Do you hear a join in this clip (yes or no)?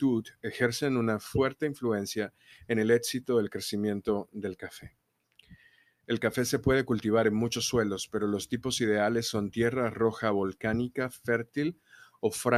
no